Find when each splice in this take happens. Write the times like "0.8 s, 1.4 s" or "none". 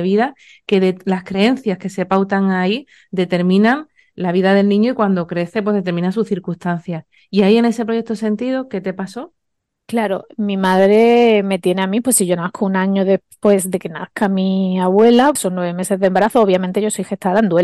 15.4 s